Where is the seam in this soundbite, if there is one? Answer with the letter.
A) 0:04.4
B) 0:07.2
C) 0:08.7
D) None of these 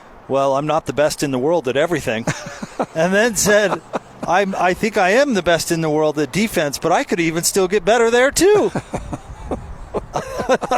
D